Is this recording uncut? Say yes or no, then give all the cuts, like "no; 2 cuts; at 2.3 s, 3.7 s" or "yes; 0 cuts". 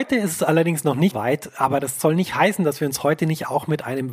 no; 1 cut; at 1.1 s